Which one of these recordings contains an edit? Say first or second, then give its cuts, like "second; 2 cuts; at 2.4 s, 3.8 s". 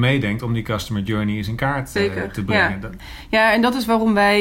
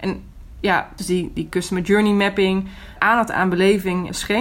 second; 1 cut; at 1.0 s